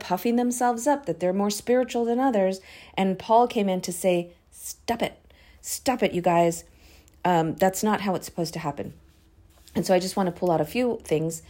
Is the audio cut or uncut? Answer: uncut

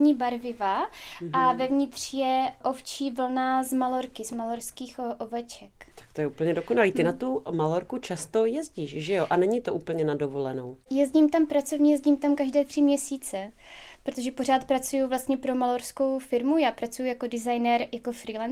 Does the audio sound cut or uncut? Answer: cut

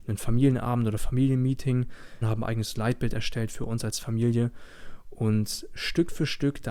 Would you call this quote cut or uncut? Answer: cut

